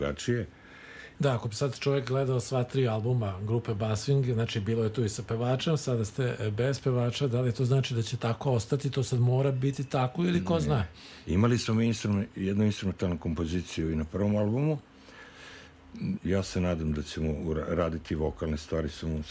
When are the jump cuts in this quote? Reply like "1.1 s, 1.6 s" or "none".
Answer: 1.2 s, 16.2 s